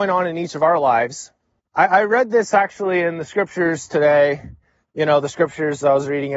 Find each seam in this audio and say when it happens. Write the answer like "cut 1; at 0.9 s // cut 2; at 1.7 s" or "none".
cut 1; at 1.6 s